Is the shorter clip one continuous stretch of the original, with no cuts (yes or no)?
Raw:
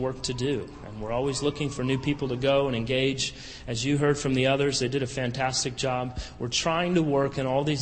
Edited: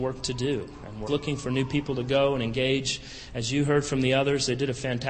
no